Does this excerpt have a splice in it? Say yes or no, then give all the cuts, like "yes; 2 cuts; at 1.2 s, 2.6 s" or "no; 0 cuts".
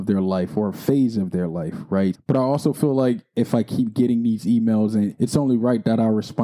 yes; 2 cuts; at 2.1 s, 5.1 s